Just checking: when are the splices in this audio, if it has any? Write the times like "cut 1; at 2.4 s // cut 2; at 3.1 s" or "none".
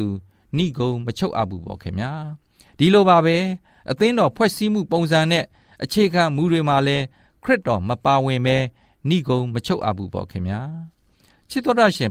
none